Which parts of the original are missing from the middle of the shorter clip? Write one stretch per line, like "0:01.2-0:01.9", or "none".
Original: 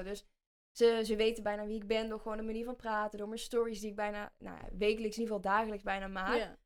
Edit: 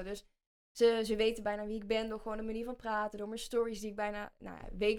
none